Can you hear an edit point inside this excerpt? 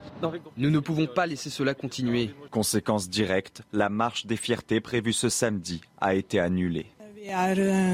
yes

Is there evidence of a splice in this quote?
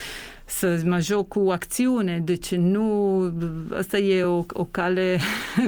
no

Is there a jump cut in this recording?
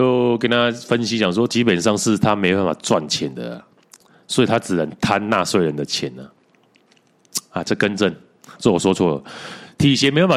yes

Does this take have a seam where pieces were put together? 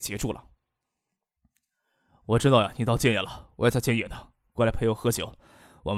no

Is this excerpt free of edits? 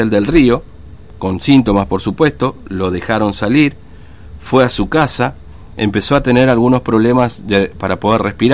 yes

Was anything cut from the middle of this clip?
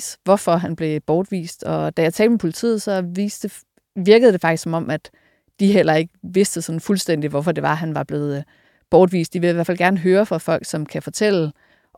no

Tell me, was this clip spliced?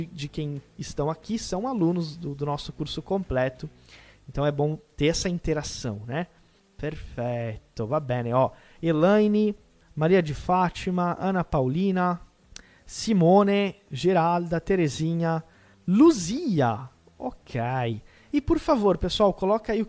yes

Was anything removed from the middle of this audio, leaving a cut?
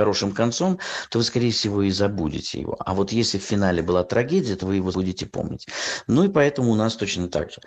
yes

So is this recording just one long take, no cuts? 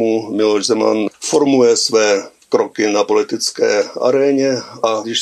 yes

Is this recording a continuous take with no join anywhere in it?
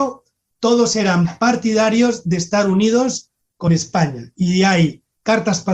yes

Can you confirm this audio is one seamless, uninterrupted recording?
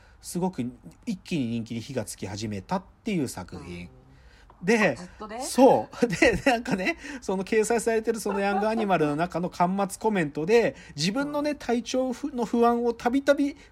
no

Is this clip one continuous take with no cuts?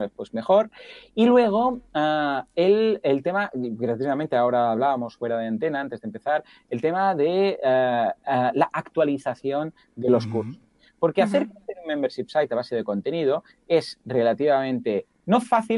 yes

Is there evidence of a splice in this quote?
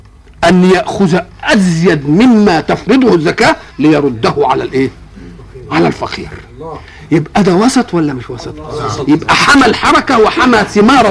yes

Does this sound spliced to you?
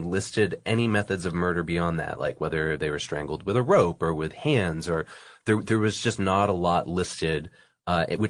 no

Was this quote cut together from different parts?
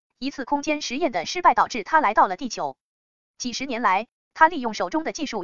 no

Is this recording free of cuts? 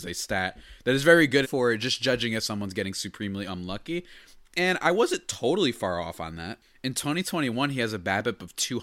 no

